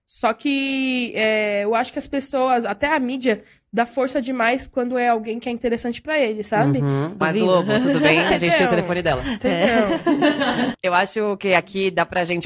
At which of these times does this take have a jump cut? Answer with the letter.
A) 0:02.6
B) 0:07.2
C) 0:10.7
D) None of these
B